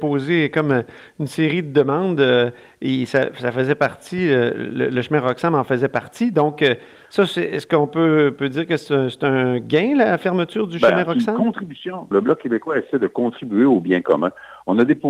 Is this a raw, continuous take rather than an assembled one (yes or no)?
no